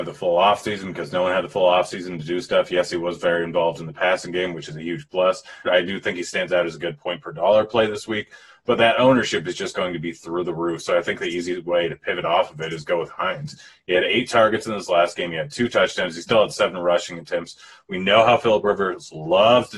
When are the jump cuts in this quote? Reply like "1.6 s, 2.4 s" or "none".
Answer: 5.7 s